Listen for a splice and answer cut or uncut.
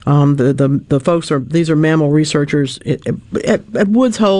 uncut